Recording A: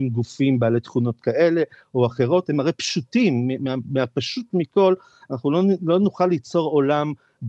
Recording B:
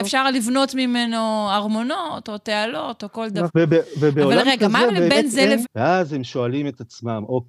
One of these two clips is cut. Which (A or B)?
B